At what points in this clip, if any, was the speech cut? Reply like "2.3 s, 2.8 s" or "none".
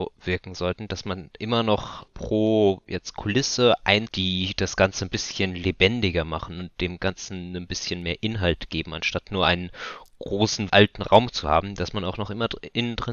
2.1 s, 4.1 s, 10.7 s

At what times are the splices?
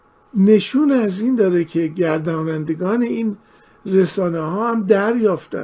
none

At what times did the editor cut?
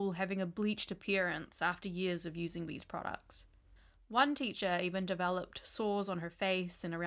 none

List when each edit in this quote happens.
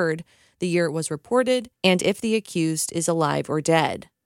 none

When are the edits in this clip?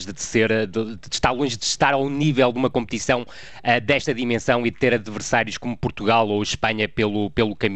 none

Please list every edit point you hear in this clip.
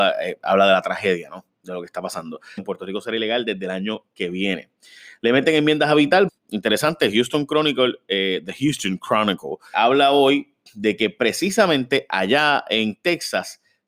2.6 s, 6.3 s, 9.7 s

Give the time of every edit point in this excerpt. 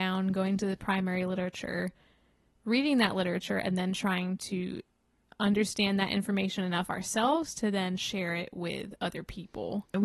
none

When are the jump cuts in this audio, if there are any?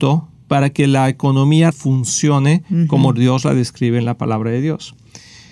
1.7 s

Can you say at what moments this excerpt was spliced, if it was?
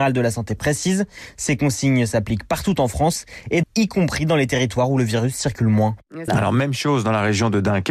3.6 s, 6.3 s

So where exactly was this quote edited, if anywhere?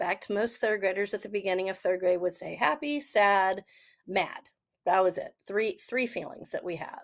4.0 s

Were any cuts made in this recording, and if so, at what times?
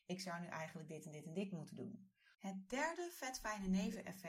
2.3 s

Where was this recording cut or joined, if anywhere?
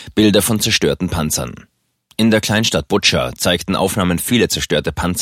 none

